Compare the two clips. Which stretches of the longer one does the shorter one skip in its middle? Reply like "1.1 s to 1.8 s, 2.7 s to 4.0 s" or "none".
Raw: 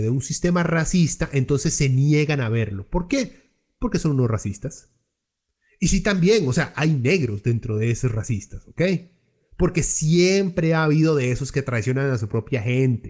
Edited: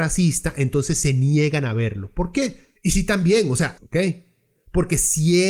3.5 s to 5.7 s, 6.7 s to 8.6 s